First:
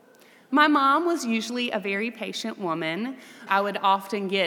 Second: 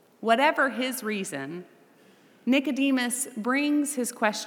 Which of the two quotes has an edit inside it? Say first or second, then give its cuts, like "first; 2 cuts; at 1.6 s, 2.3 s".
first; 1 cut; at 3.5 s